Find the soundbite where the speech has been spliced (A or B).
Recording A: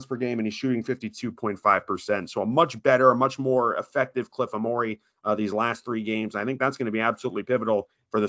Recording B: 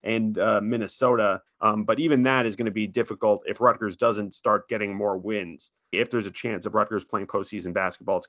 B